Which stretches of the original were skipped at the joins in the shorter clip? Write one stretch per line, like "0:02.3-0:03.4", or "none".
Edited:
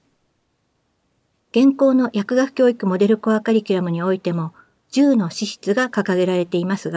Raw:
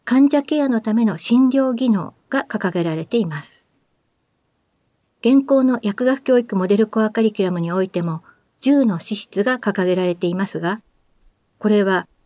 none